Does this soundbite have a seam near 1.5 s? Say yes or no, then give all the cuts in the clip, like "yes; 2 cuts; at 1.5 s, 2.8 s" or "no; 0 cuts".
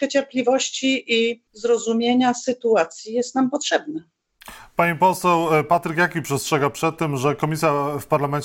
yes; 1 cut; at 1.5 s